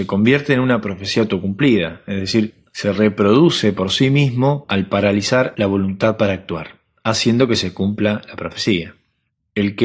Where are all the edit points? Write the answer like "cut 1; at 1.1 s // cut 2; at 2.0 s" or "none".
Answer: none